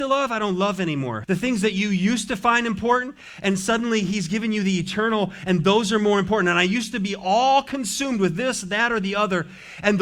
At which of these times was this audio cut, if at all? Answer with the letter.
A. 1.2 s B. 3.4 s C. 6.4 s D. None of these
A